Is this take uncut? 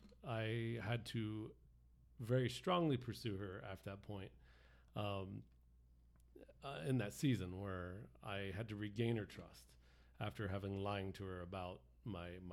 yes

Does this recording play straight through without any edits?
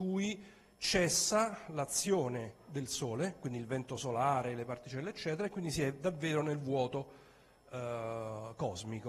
yes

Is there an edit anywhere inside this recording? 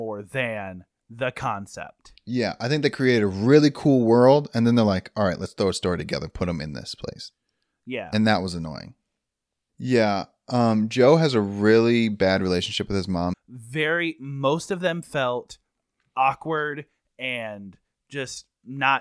yes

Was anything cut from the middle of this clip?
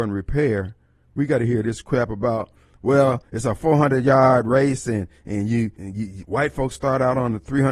yes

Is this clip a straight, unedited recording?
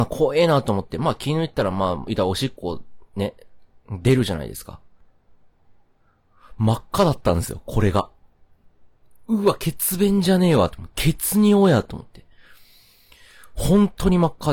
yes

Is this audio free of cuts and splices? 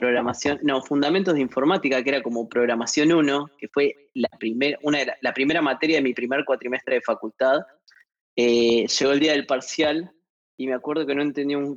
yes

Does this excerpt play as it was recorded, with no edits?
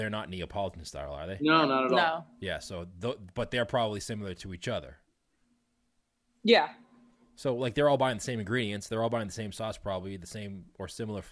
yes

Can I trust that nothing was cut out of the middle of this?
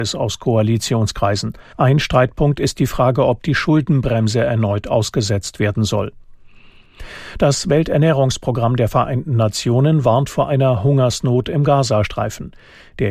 no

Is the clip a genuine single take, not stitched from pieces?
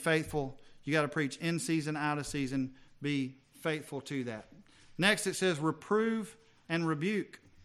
yes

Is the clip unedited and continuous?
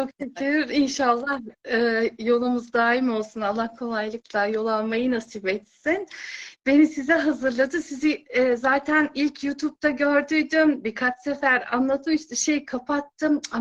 yes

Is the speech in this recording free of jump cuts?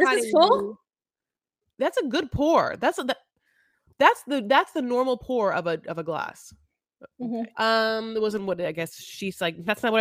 no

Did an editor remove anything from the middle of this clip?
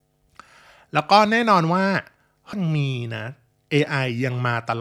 yes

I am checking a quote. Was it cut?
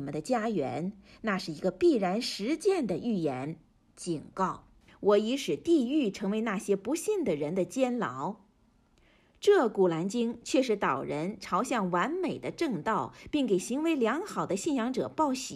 yes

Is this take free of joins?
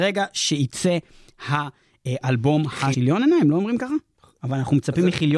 no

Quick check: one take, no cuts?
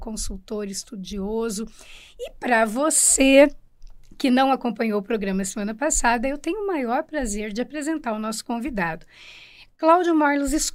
yes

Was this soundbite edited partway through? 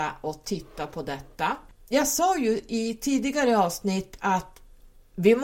no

